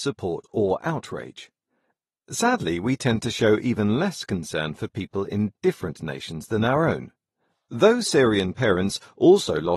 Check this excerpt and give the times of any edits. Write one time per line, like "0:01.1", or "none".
none